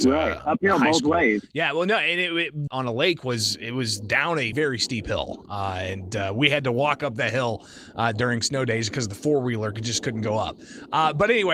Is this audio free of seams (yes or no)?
no